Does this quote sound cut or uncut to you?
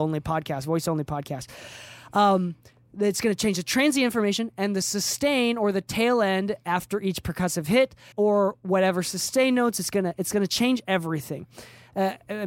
cut